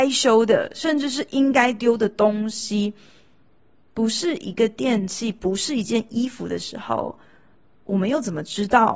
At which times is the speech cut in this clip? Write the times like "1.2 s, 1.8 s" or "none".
none